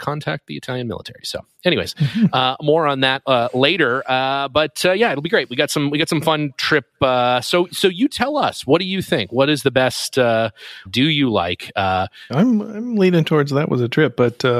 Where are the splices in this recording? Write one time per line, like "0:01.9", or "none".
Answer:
0:10.9
0:12.3